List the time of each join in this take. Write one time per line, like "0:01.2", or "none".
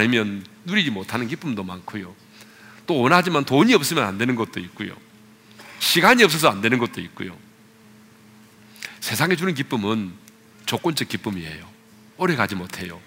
none